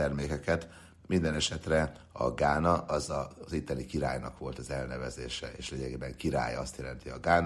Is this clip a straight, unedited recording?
yes; 0 cuts

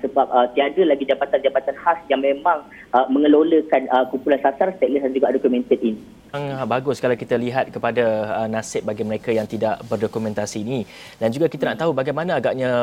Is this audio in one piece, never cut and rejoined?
no; 1 cut; at 6.3 s

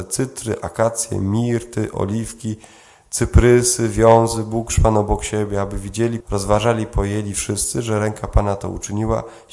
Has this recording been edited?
yes; 1 cut; at 6.2 s

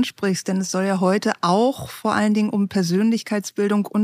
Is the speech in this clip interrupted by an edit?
no; 0 cuts

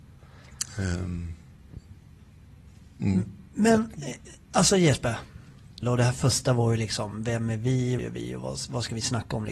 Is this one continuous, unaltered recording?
no; 2 cuts; at 5.8 s, 8.0 s

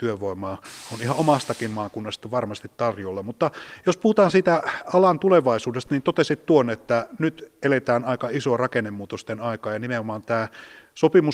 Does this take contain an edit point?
no; 0 cuts

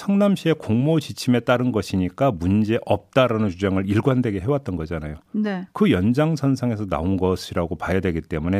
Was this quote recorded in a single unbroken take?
yes; 0 cuts

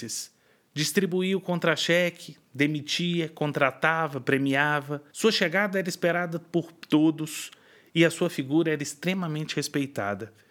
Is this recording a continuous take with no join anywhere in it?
no; 1 cut; at 5.1 s

